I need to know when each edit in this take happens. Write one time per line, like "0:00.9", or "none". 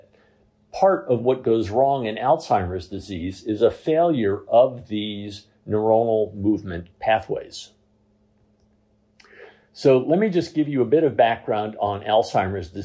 none